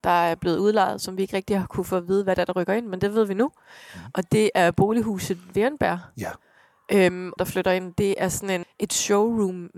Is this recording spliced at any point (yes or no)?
yes